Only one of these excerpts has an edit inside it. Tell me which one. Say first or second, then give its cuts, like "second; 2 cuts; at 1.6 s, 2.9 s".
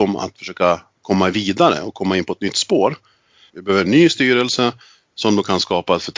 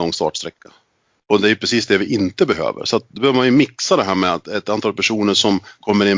first; 1 cut; at 3.5 s